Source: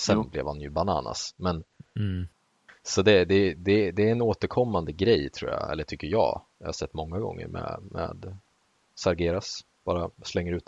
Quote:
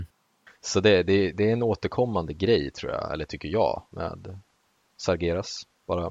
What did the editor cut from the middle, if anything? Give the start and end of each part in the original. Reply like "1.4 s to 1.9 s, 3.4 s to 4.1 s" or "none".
3.6 s to 3.9 s, 6.5 s to 7.9 s